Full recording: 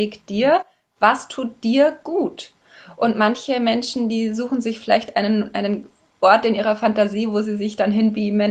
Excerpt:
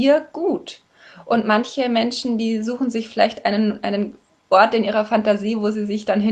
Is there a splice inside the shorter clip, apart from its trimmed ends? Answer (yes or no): no